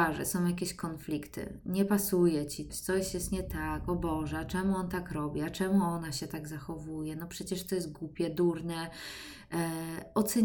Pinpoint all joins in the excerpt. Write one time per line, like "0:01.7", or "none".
0:02.7